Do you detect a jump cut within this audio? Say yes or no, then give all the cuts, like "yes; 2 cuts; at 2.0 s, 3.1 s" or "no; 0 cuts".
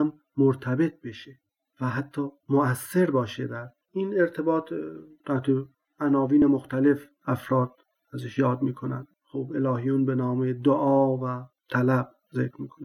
no; 0 cuts